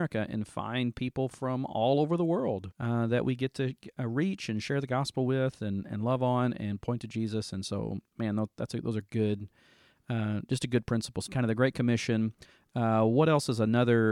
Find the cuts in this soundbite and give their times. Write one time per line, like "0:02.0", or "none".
0:02.7
0:11.3

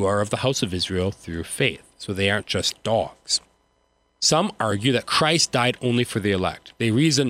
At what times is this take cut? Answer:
0:04.0

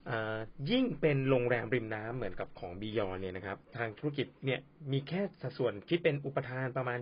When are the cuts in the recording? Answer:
0:04.4

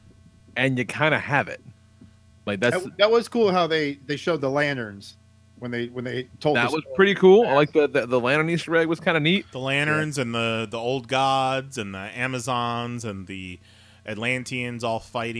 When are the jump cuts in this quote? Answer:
none

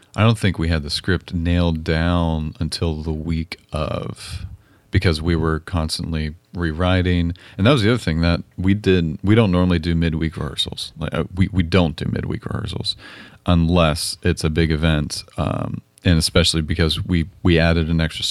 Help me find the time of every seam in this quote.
none

